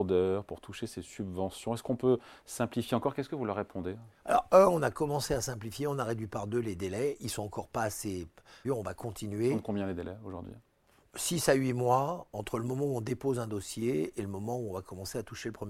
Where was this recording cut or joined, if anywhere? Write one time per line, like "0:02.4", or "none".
0:08.6